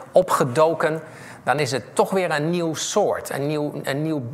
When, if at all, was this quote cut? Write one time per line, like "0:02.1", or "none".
none